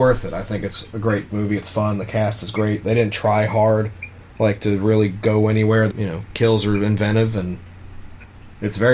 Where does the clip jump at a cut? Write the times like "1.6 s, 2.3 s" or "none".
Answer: 5.9 s